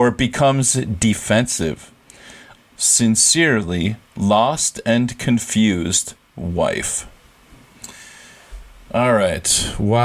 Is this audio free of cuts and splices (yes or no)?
no